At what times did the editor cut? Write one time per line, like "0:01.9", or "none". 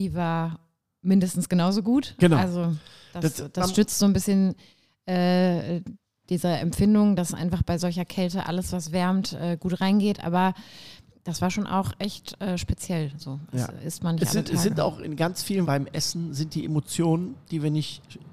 0:15.6

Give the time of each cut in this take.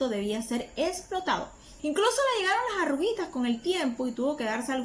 0:01.8

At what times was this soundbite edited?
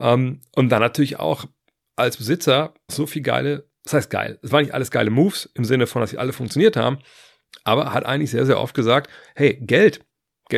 0:02.9

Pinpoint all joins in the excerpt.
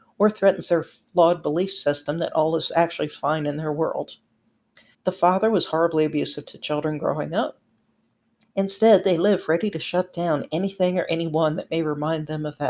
0:04.9
0:08.4

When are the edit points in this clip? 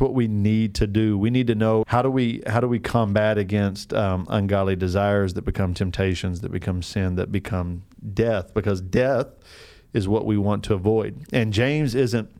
0:01.8

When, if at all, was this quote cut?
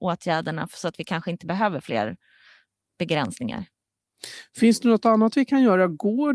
none

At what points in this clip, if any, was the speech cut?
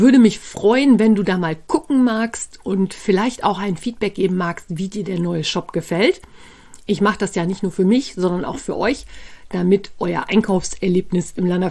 none

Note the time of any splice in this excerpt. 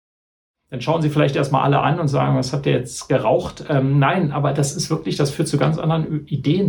none

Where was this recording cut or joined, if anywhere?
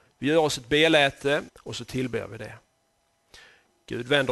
0:01.5

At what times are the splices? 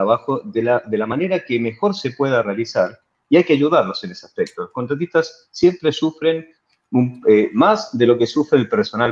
none

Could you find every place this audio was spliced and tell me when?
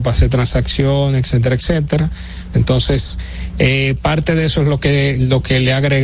0:02.5

